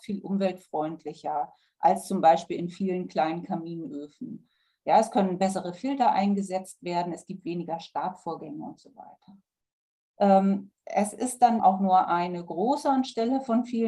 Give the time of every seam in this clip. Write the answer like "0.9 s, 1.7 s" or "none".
11.6 s